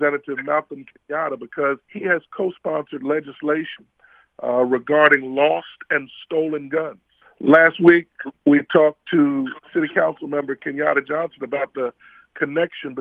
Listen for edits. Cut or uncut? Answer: cut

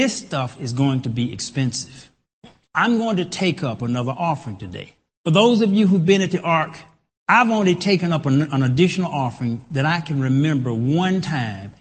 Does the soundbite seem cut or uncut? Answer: uncut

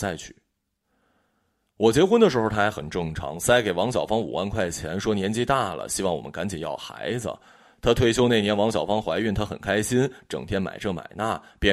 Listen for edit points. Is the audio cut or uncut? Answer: uncut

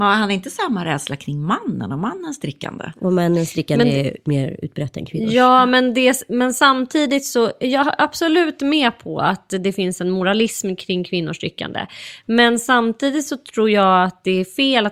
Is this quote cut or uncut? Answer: uncut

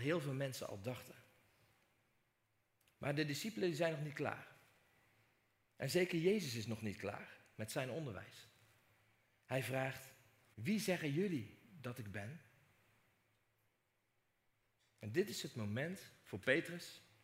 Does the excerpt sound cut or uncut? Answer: cut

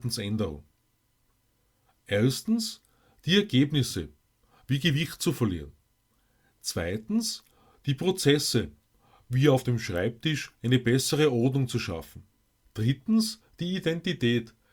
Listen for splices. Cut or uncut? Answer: uncut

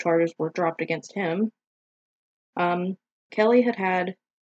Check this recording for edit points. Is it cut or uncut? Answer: cut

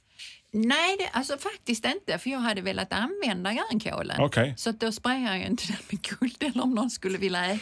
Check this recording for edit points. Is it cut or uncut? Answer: uncut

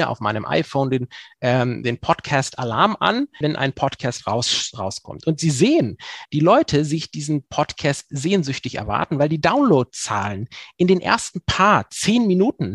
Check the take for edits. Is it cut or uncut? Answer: cut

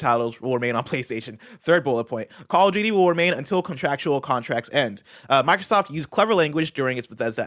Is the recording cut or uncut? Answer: uncut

